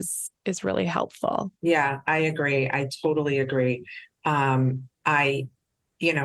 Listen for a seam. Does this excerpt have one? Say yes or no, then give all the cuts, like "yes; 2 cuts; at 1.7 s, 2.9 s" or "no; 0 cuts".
no; 0 cuts